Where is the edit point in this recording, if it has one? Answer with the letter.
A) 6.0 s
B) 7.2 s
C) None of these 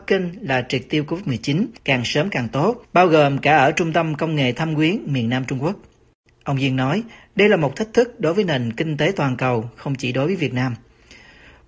C